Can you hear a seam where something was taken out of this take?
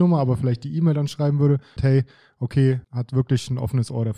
yes; 2 cuts; at 1.8 s, 2.8 s

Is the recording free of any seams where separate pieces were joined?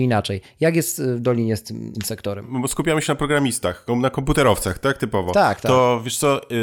yes; 0 cuts

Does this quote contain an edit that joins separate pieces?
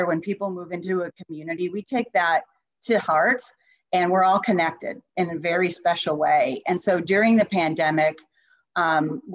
no; 0 cuts

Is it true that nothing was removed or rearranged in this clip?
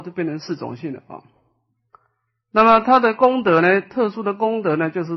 yes; 0 cuts

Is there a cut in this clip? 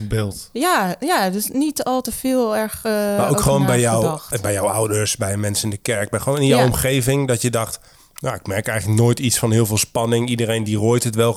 no; 0 cuts

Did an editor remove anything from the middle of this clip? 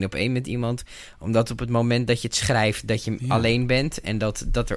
no; 0 cuts

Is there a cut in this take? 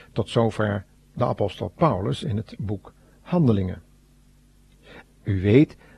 yes; 1 cut; at 5.0 s

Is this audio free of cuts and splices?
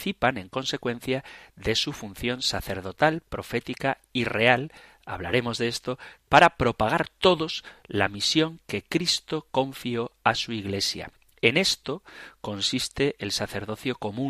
no; 1 cut; at 6.2 s

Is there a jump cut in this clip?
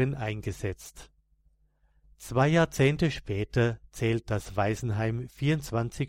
no; 0 cuts

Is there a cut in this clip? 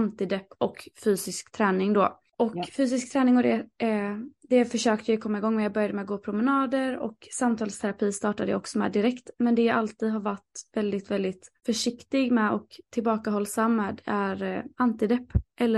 no; 0 cuts

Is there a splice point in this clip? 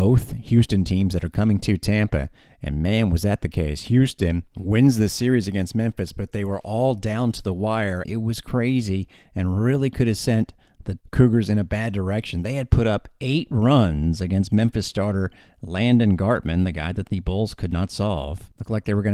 yes; 1 cut; at 8.0 s

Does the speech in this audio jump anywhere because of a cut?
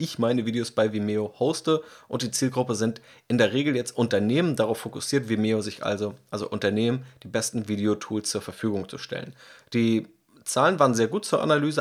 no; 0 cuts

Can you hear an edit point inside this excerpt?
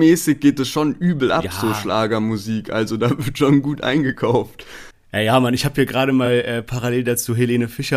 no; 0 cuts

